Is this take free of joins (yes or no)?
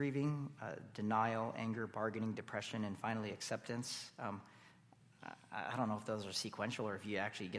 yes